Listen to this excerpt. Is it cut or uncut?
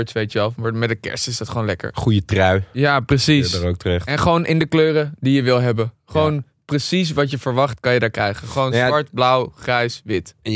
uncut